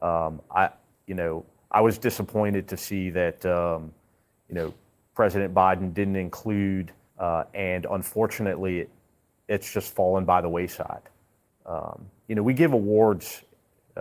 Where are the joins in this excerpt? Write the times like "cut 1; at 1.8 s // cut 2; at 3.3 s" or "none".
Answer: cut 1; at 7.1 s // cut 2; at 11.5 s

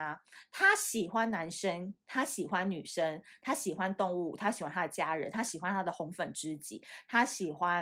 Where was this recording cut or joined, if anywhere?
none

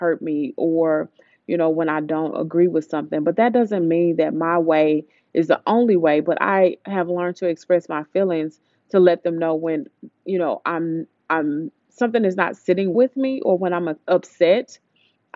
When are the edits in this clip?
cut 1; at 12.9 s // cut 2; at 14.0 s

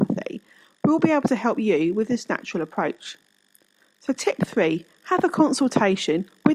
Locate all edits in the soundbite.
none

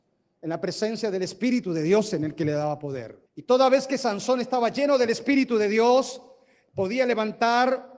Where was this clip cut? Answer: cut 1; at 3.3 s

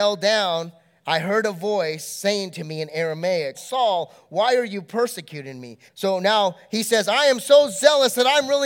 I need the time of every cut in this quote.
cut 1; at 3.5 s // cut 2; at 5.9 s

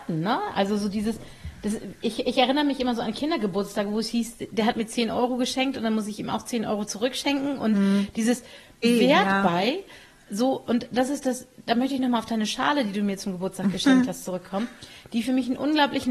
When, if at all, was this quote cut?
cut 1; at 8.8 s

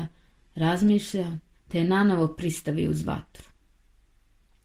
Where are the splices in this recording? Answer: cut 1; at 1.5 s

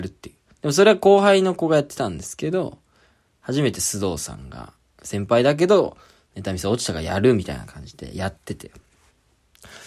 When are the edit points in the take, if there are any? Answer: none

